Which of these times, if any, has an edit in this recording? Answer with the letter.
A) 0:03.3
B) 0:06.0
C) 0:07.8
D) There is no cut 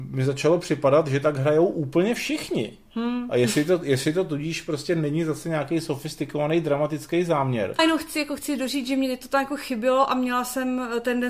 C